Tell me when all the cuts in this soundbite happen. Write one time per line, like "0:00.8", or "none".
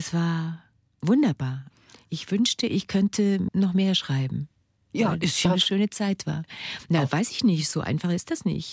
none